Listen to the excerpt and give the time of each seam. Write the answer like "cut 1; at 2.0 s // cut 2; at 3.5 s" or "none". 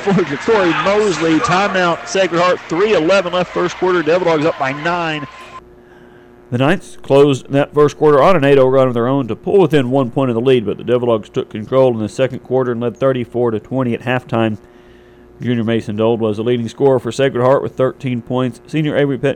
none